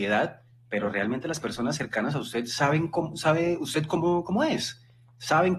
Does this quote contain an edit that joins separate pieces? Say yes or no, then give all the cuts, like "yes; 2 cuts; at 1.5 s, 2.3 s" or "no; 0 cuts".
no; 0 cuts